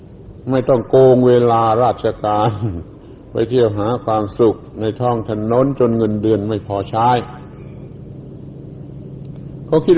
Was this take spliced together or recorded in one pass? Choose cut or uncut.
uncut